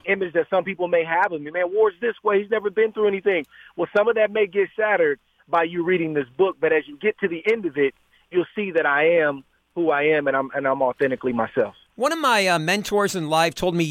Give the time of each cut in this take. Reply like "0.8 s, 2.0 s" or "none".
none